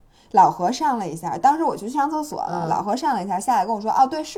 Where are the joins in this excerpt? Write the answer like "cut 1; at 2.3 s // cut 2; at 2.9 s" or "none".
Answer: none